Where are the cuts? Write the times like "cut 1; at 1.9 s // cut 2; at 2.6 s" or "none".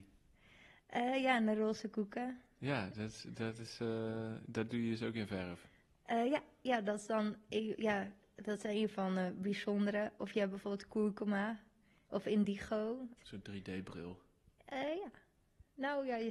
cut 1; at 12.1 s // cut 2; at 13.2 s